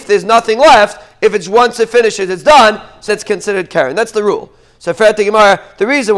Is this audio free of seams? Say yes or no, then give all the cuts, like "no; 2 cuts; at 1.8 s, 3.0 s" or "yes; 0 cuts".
no; 1 cut; at 3.1 s